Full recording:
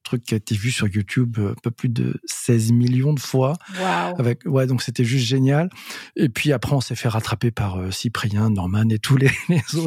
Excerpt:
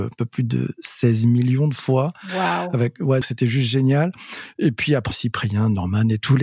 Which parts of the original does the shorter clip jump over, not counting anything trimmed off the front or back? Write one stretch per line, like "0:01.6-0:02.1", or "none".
0:04.7-0:04.8
0:06.7-0:07.9